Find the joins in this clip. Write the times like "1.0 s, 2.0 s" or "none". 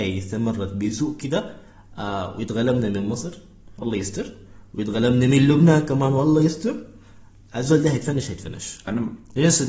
none